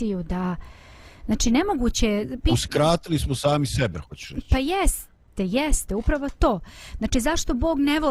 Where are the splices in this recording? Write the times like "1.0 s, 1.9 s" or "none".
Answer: none